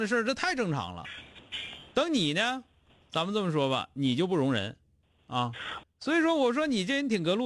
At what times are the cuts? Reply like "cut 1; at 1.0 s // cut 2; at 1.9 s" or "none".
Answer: cut 1; at 5.8 s